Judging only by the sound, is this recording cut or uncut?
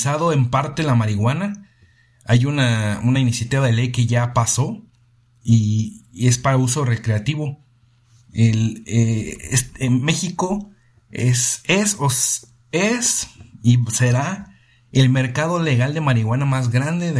uncut